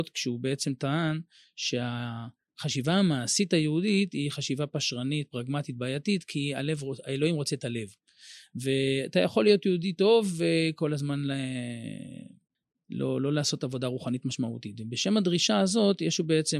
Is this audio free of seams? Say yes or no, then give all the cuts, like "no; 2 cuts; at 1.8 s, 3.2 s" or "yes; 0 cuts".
yes; 0 cuts